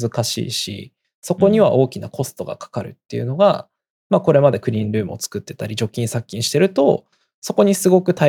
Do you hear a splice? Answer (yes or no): no